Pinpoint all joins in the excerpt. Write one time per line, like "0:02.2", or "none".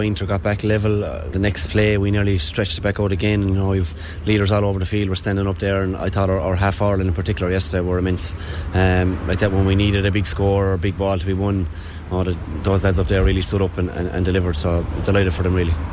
0:01.3